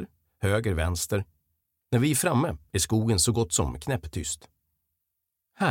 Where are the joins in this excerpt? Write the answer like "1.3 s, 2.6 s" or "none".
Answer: none